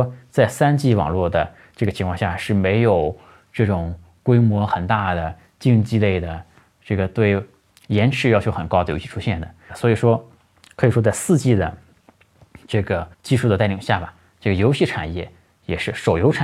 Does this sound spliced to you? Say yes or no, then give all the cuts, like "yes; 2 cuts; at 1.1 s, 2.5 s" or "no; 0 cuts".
yes; 2 cuts; at 9.7 s, 13.1 s